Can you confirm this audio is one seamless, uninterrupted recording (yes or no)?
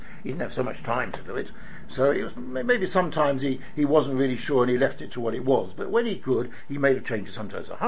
yes